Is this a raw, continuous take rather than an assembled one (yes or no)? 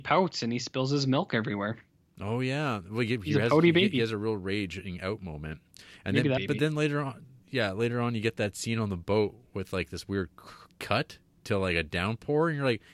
no